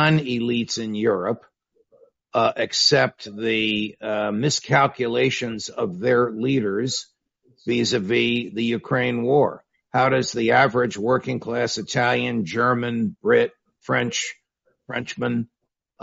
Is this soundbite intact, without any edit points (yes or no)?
yes